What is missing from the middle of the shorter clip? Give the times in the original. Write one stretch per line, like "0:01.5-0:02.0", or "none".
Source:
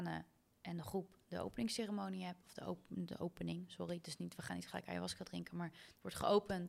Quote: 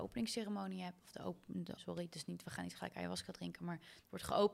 0:03.2-0:03.7